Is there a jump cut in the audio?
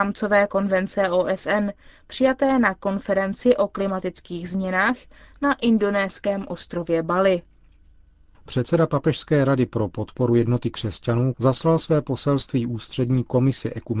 yes; 2 cuts; at 8.3 s, 11.3 s

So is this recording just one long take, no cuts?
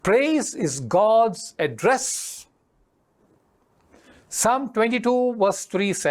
yes; 0 cuts

